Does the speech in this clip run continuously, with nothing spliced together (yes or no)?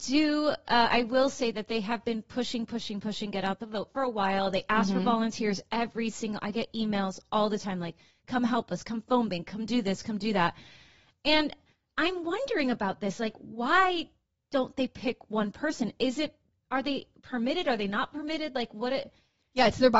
yes